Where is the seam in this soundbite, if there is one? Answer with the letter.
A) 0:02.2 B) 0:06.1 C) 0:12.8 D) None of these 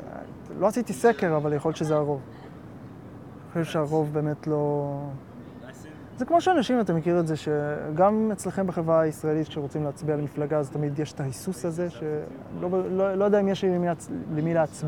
D